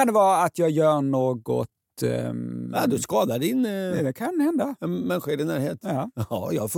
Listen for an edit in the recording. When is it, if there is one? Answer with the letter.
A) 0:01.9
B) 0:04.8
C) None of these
C